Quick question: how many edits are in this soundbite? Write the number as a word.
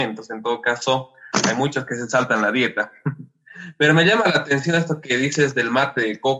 zero